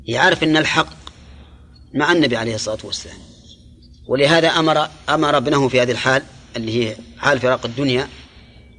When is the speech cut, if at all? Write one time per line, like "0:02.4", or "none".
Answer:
none